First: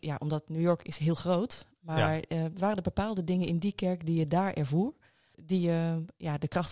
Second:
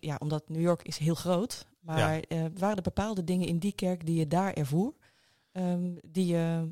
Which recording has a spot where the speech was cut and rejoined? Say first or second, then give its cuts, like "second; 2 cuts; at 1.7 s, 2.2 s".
first; 1 cut; at 5.3 s